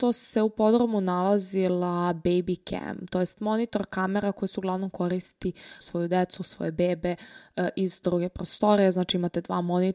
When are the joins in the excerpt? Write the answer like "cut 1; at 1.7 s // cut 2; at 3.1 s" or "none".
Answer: cut 1; at 5.8 s